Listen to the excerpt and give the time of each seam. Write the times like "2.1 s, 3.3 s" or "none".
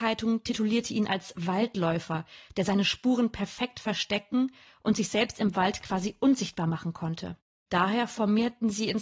7.7 s